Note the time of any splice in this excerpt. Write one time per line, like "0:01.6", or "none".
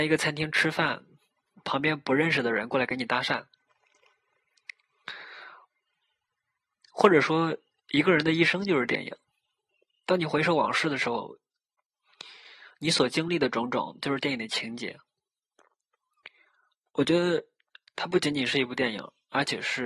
none